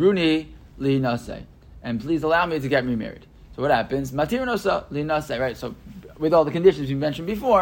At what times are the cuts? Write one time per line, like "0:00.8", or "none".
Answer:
none

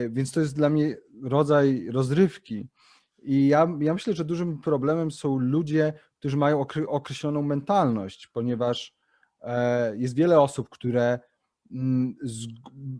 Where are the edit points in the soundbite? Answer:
none

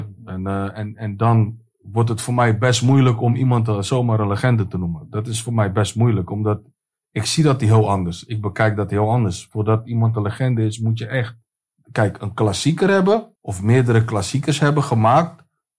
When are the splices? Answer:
0:11.7
0:13.4

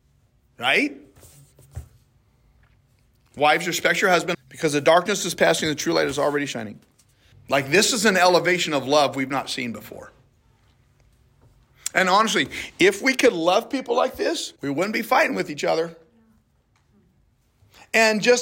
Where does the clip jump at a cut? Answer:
0:04.3
0:07.3
0:14.6

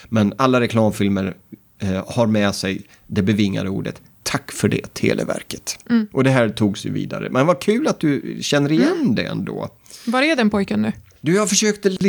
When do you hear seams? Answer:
none

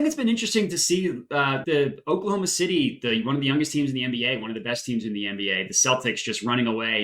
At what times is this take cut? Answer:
0:01.6

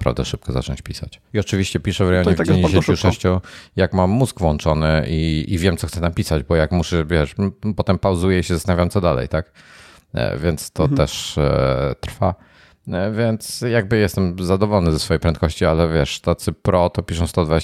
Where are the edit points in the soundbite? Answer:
0:01.3

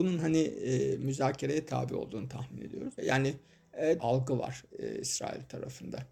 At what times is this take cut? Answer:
0:03.0
0:04.0

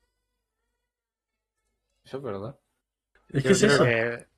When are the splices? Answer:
0:03.2

